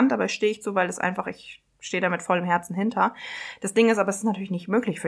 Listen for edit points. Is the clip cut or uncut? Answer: uncut